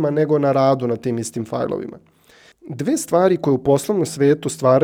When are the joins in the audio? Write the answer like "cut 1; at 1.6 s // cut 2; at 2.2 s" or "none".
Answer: cut 1; at 2.5 s